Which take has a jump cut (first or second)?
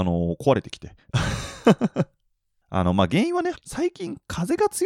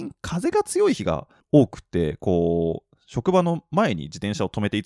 first